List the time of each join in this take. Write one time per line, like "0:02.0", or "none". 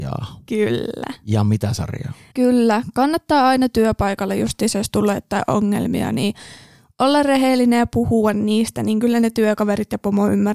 0:02.3

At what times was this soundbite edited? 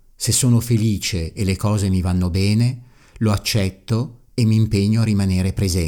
none

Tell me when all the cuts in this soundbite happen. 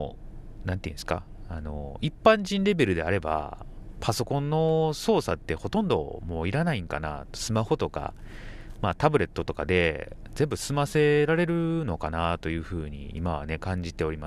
none

